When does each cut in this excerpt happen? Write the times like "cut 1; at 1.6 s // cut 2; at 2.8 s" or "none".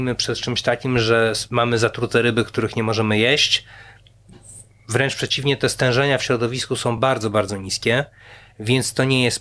none